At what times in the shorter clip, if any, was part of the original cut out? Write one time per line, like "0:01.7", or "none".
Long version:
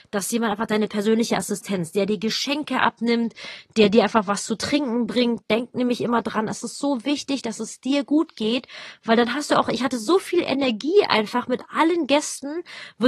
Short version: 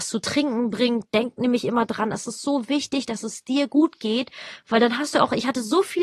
none